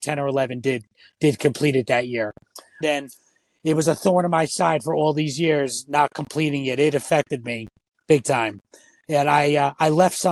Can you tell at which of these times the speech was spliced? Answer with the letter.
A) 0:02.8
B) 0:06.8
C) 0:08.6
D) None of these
A